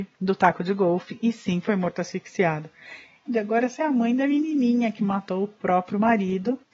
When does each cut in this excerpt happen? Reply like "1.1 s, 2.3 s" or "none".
3.2 s